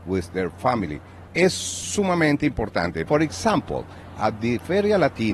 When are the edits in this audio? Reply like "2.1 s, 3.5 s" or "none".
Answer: 1.3 s, 3.1 s